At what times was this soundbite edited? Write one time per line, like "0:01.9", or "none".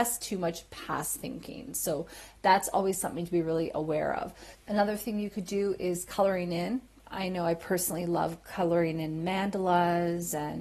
0:04.5